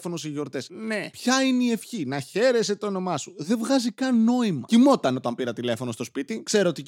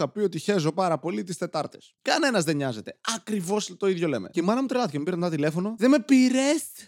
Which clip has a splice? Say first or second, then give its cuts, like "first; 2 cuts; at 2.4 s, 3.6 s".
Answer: first; 1 cut; at 4.7 s